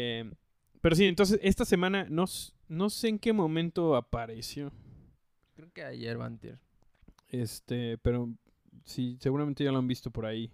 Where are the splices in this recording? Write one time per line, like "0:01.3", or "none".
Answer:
none

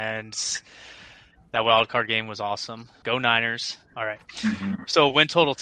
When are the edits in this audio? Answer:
0:03.0

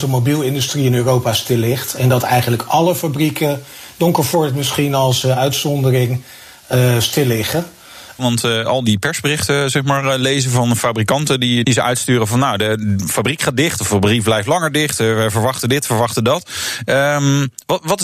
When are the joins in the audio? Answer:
0:08.2
0:11.6

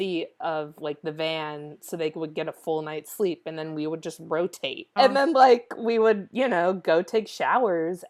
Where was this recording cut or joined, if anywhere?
0:05.0

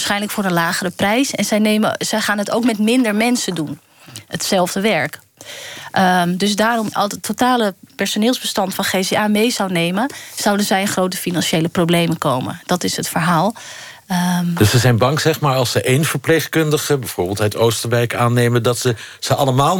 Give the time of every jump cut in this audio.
0:06.9

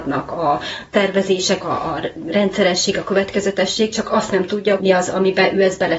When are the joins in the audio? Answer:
0:01.6
0:04.8

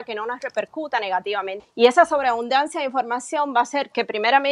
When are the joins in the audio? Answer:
0:01.6

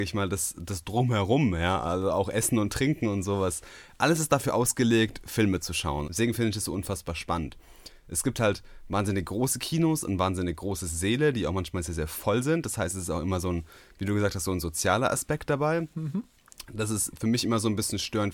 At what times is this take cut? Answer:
0:06.0

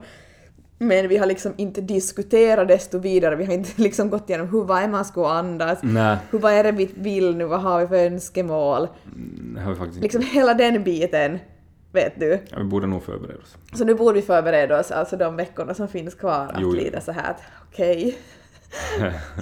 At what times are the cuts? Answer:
none

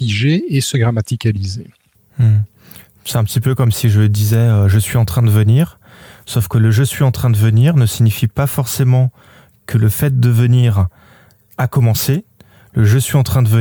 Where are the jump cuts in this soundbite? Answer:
none

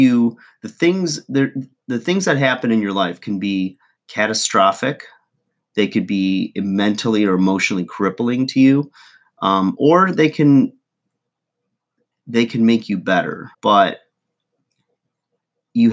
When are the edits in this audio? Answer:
0:13.5

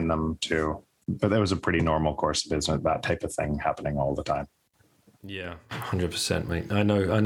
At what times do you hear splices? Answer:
none

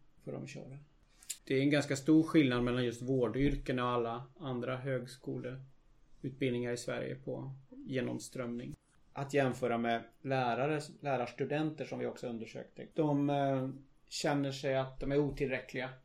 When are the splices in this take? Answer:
0:01.4
0:08.9
0:12.9

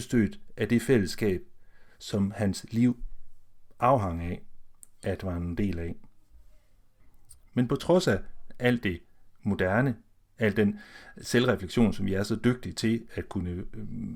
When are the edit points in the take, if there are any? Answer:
0:07.5

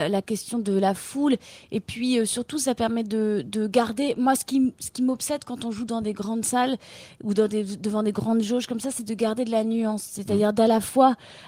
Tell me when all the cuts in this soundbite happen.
none

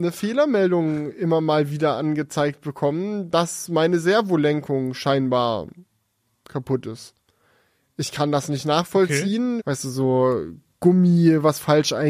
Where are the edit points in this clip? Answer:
0:09.6

